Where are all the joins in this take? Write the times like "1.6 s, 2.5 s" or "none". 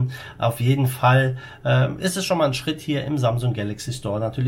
none